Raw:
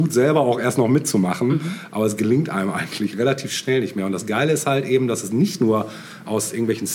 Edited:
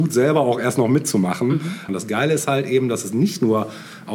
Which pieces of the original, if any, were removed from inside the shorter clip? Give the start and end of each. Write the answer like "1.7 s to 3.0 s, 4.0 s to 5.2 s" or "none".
1.9 s to 4.1 s